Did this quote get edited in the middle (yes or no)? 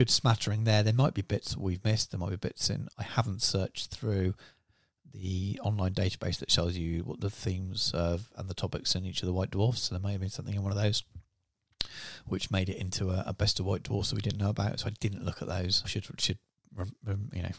yes